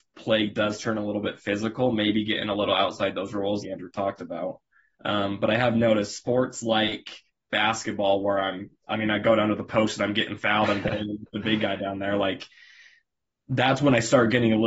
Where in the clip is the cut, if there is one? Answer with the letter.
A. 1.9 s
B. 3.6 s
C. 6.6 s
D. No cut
B